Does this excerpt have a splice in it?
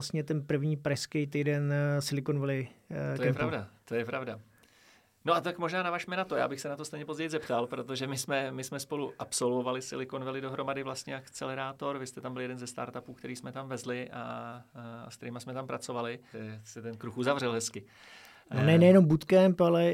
yes; 1 cut; at 16.3 s

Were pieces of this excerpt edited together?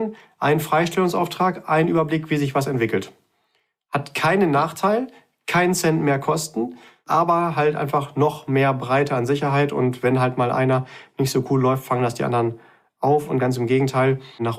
no; 0 cuts

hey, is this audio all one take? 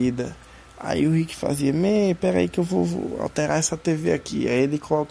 yes; 0 cuts

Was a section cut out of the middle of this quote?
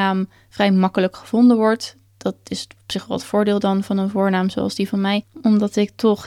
yes; 1 cut; at 5.3 s

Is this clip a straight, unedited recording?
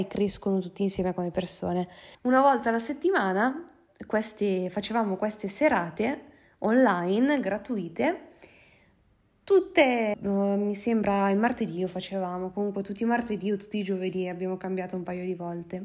no; 2 cuts; at 2.1 s, 10.1 s

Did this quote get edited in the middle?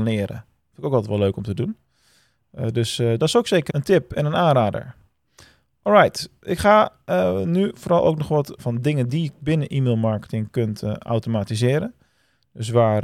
yes; 2 cuts; at 3.7 s, 8.6 s

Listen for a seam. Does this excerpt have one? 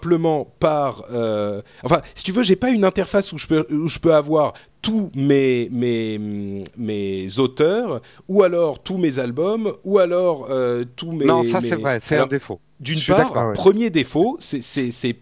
yes; 1 cut; at 12.0 s

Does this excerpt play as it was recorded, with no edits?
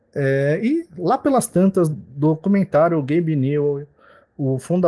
no; 1 cut; at 1.9 s

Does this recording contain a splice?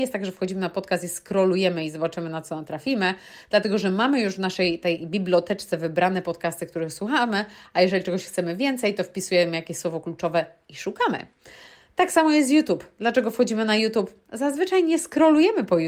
no; 0 cuts

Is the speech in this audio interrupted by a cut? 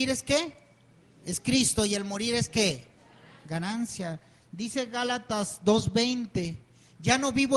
no; 0 cuts

